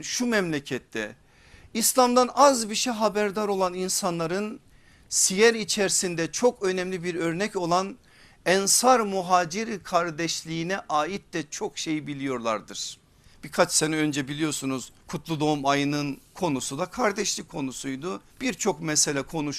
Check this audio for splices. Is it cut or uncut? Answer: cut